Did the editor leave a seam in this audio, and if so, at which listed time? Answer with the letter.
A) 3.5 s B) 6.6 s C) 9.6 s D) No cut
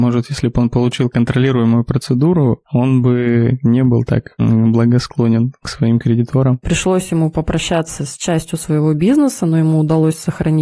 B